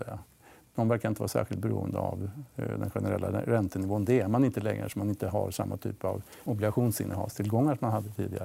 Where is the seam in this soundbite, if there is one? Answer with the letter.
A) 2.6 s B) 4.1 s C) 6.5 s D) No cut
C